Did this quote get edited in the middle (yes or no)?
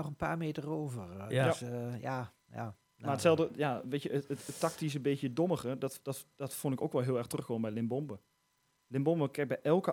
no